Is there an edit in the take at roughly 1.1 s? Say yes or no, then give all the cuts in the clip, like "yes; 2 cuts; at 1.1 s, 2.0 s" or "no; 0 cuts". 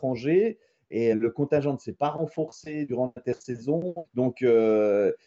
yes; 3 cuts; at 1.1 s, 2.9 s, 4.0 s